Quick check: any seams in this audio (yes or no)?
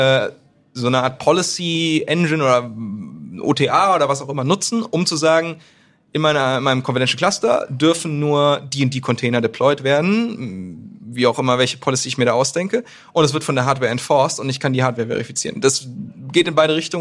no